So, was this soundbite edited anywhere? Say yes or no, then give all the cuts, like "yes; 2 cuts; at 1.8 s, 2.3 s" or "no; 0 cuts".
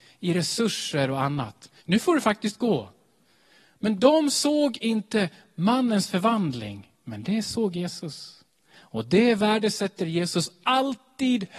yes; 1 cut; at 1.8 s